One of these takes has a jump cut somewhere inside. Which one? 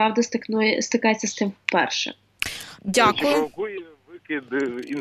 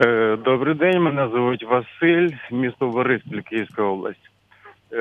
first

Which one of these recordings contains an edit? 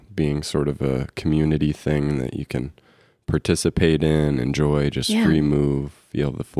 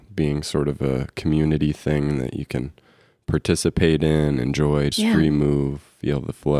second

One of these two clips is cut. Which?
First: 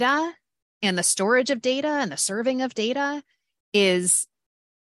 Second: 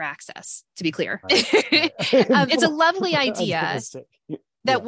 second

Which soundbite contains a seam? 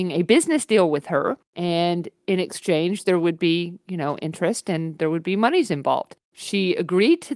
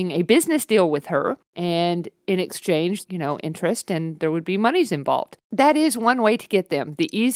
second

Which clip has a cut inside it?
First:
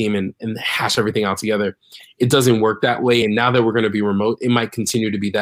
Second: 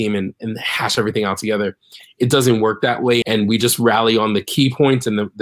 second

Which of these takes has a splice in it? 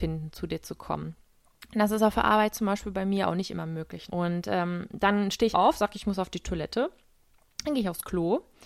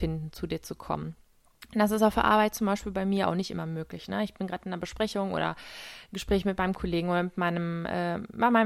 first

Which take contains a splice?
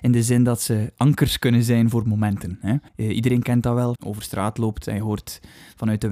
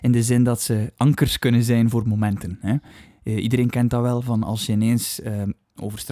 first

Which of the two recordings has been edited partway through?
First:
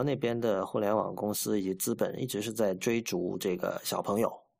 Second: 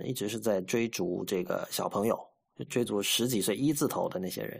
second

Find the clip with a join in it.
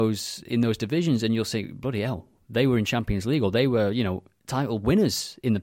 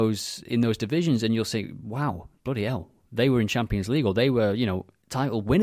first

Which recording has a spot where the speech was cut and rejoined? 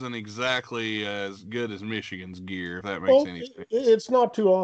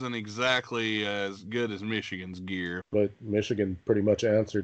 second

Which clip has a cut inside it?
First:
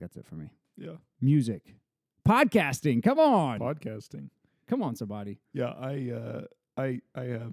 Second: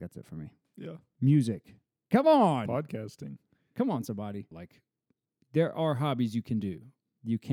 second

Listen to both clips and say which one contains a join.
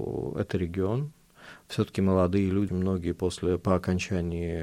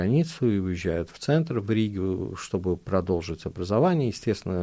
first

